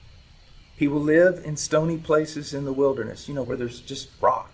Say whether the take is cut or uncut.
uncut